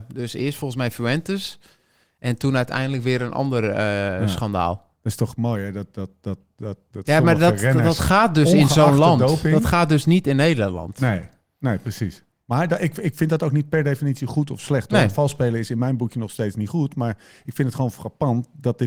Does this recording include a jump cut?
no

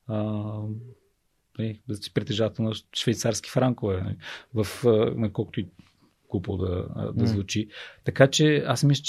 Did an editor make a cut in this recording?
no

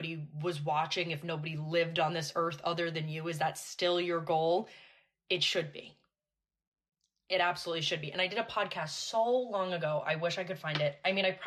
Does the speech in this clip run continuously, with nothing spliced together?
yes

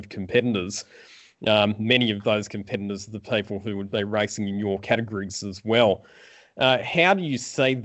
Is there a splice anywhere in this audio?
no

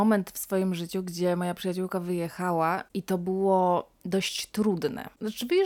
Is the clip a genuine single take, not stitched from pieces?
yes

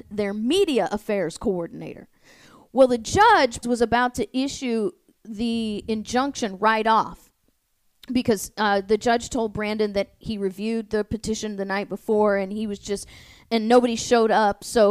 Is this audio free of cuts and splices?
no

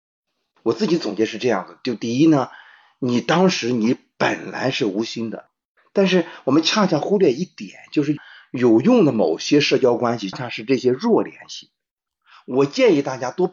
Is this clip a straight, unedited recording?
no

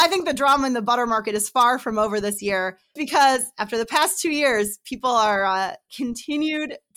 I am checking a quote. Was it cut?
yes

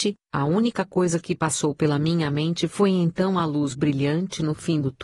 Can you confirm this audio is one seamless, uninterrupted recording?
yes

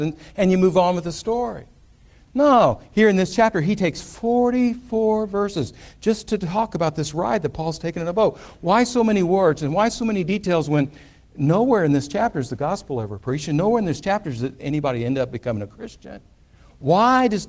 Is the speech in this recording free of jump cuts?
yes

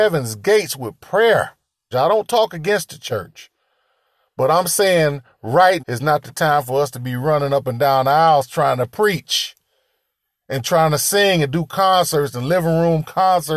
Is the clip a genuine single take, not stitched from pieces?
no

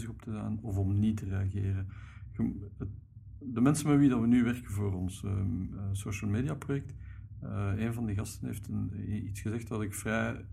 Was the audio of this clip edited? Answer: no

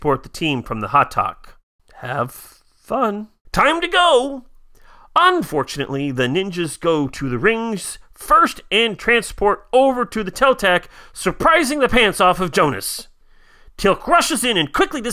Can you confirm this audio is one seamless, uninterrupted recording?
no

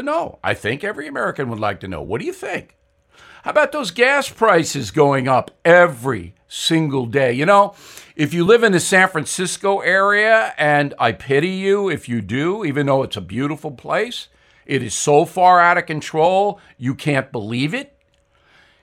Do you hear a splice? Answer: no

